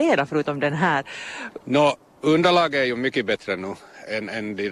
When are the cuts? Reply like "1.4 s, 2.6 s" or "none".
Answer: 1.6 s